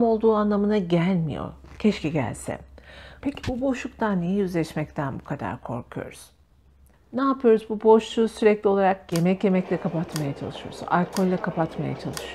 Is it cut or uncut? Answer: cut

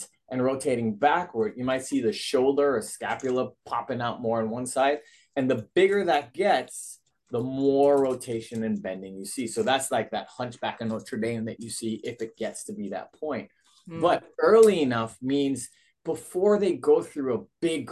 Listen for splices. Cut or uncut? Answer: uncut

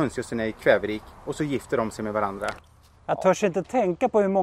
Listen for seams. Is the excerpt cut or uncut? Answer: uncut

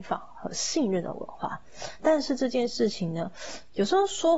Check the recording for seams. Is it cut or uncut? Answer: cut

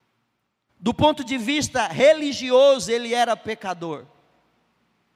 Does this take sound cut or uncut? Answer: uncut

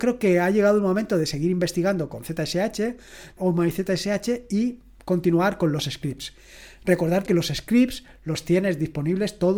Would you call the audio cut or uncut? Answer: cut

